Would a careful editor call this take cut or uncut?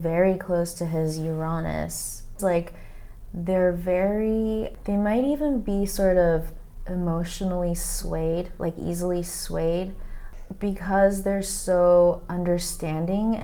cut